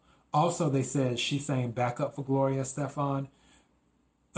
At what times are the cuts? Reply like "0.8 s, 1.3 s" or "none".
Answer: none